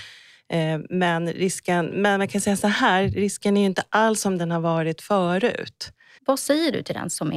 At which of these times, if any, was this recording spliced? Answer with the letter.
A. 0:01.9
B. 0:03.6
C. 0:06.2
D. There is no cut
C